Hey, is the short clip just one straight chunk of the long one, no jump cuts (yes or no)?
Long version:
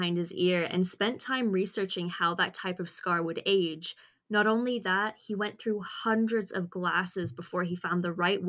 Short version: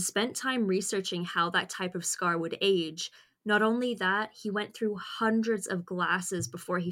yes